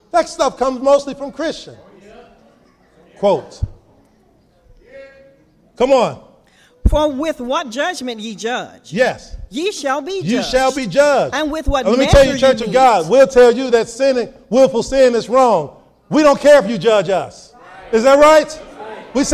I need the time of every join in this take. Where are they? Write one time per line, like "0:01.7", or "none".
none